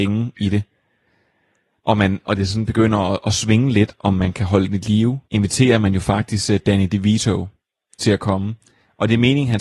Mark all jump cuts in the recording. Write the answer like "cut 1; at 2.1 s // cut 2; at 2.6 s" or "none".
cut 1; at 5.3 s